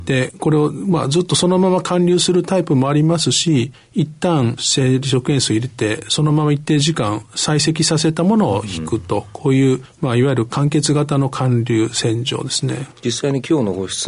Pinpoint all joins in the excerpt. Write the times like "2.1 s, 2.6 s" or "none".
12.9 s